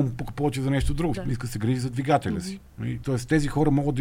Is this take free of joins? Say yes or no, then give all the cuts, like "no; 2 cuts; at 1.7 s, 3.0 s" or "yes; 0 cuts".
no; 2 cuts; at 1.1 s, 3.0 s